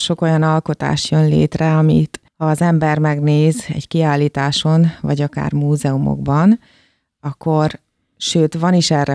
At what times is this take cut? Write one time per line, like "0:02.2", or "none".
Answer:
0:02.3

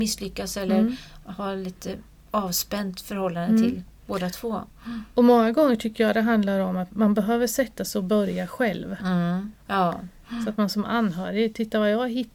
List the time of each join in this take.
0:06.9
0:09.7

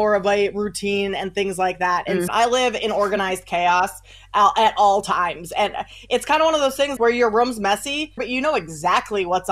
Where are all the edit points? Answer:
0:02.3
0:07.0
0:08.2

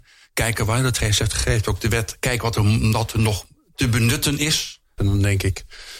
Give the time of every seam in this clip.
0:05.0

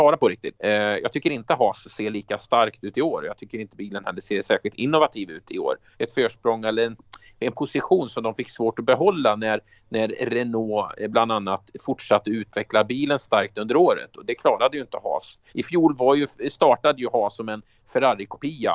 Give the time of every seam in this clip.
0:05.9
0:15.5

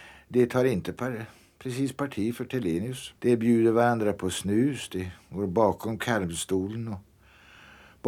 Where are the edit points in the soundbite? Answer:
0:03.2

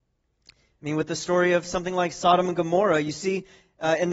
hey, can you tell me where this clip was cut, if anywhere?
none

